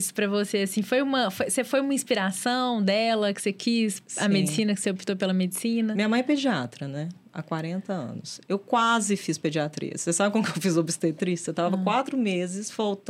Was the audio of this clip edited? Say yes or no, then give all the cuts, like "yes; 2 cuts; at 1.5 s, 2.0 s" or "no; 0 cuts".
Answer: no; 0 cuts